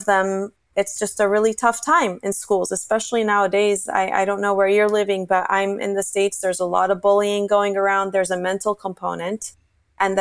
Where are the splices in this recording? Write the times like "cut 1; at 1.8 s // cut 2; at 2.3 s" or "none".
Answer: none